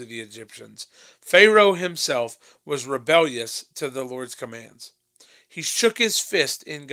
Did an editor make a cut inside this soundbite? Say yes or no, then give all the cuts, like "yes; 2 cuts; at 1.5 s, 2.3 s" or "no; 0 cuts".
no; 0 cuts